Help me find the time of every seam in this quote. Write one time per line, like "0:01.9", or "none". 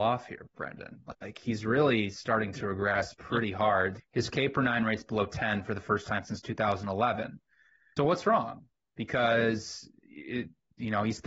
0:04.0
0:08.0